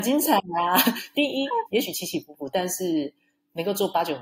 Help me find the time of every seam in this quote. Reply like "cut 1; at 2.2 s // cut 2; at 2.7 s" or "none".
cut 1; at 1.7 s